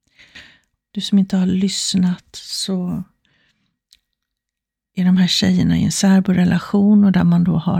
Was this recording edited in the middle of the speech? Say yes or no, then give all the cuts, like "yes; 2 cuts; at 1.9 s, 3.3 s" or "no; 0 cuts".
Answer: yes; 1 cut; at 0.9 s